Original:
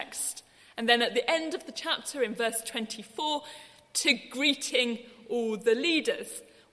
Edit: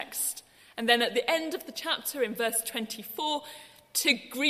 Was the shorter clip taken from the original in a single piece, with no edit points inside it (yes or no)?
yes